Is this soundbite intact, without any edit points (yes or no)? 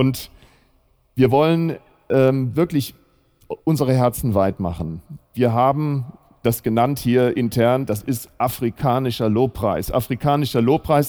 yes